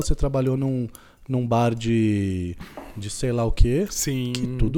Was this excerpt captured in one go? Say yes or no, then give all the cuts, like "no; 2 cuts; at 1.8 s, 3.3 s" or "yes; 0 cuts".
yes; 0 cuts